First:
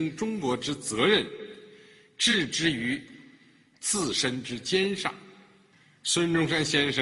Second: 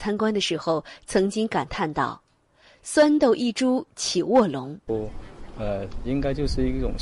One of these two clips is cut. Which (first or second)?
second